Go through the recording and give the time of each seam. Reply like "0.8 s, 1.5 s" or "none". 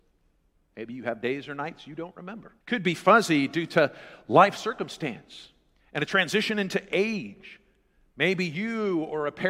2.6 s